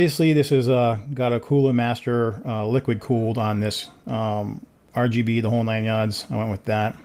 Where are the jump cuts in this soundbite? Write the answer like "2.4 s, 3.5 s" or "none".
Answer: none